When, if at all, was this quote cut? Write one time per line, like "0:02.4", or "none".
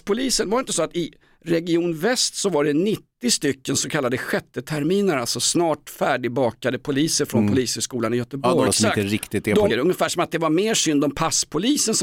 0:08.7
0:09.7